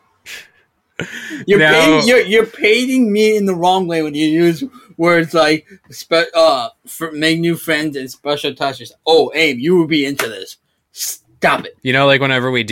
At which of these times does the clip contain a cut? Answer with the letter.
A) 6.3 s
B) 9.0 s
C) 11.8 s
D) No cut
C